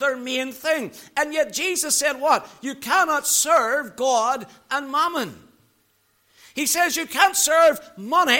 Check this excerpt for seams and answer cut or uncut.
uncut